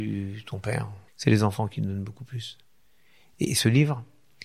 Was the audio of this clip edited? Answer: yes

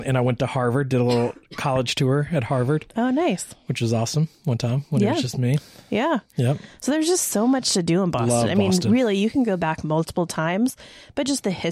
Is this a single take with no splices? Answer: yes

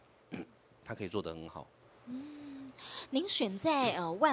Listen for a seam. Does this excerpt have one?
no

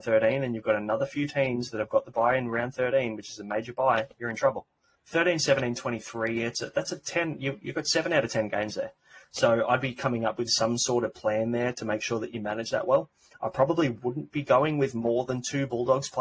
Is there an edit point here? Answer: yes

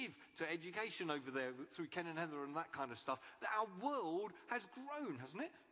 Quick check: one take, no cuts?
yes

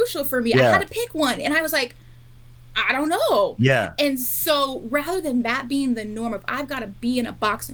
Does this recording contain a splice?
no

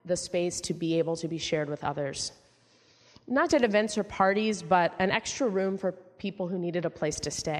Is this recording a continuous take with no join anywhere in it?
no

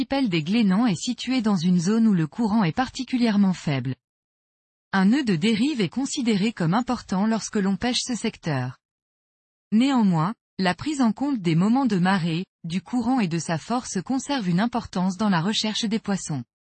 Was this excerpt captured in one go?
yes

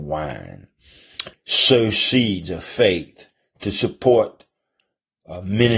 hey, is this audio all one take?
no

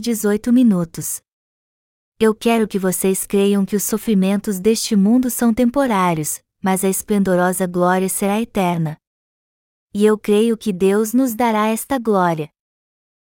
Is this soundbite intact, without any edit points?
yes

